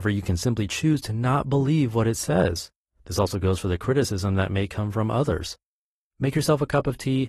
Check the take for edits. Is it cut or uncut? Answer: uncut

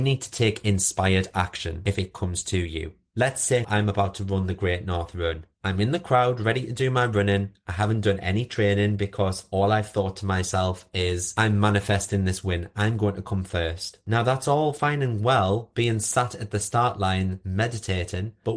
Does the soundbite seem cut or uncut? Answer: cut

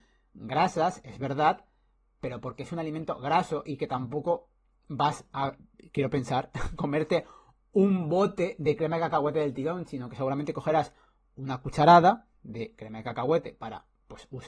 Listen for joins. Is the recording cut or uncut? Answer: uncut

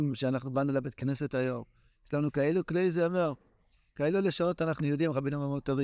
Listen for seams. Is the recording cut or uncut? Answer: uncut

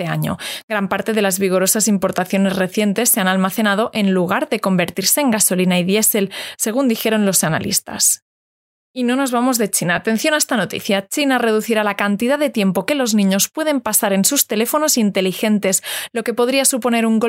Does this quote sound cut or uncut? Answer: uncut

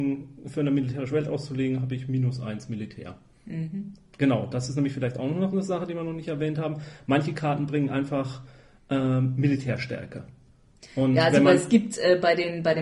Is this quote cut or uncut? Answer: uncut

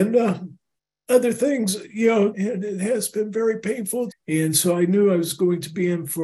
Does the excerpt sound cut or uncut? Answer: cut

